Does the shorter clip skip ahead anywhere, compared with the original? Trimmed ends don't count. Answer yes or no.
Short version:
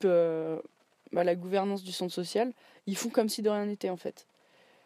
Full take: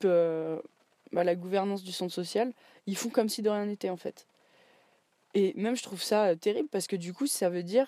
no